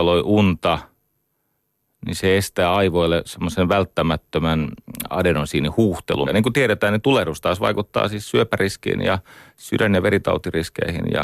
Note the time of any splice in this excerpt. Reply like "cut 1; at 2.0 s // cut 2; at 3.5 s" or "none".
cut 1; at 6.3 s

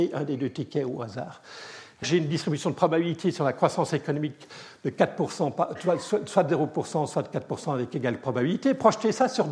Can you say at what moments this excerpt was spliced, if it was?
cut 1; at 2.0 s

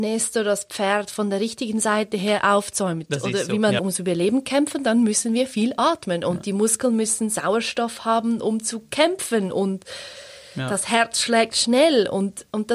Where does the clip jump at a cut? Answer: cut 1; at 3.8 s

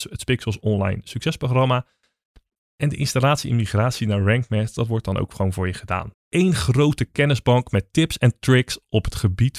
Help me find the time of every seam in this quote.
cut 1; at 6.1 s

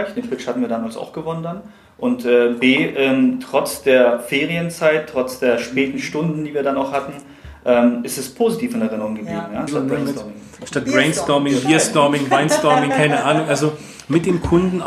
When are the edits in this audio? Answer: cut 1; at 9.7 s

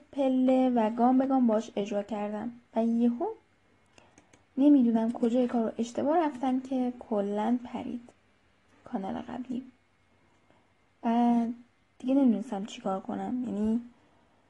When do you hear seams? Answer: none

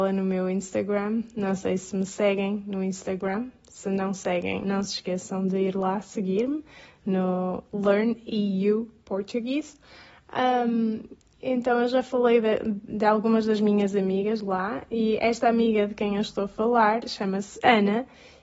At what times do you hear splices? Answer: cut 1; at 4.6 s

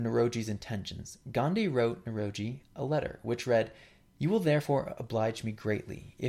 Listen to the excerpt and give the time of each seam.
none

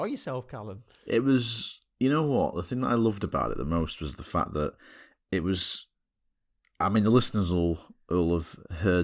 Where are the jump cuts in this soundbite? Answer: none

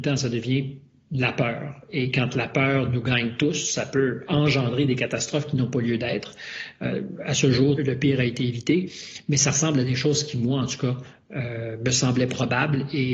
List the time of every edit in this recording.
cut 1; at 7.8 s

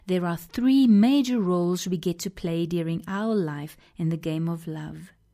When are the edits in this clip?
none

